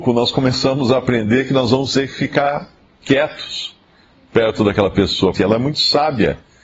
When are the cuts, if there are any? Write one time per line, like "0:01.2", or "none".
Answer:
0:05.3